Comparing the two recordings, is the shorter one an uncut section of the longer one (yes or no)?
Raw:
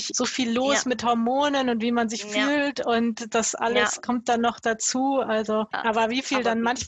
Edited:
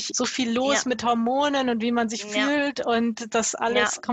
yes